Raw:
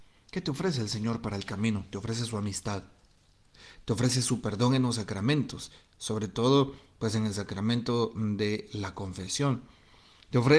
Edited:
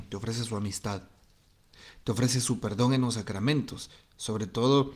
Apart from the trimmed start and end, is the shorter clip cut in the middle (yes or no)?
no